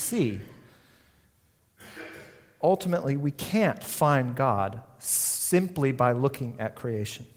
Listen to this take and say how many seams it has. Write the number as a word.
zero